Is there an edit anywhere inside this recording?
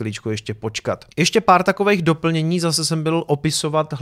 no; 0 cuts

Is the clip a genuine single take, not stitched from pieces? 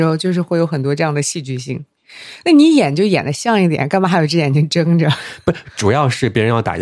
yes; 0 cuts

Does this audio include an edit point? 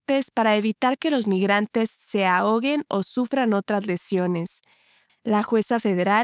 yes; 1 cut; at 5.1 s

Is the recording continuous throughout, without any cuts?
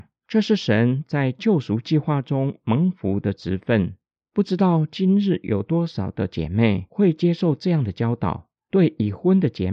yes; 0 cuts

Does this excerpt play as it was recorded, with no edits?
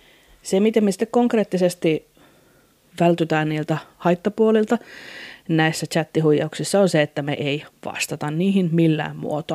yes; 0 cuts

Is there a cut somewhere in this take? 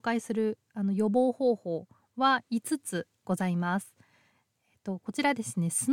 yes; 1 cut; at 4.5 s

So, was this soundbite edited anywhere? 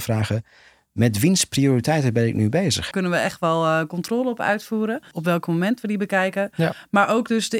yes; 1 cut; at 2.9 s

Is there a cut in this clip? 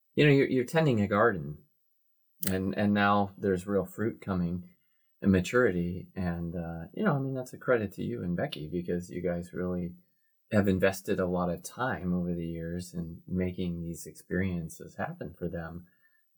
no; 0 cuts

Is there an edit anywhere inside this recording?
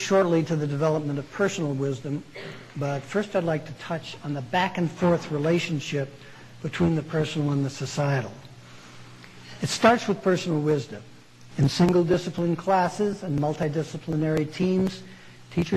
yes; 1 cut; at 11.5 s

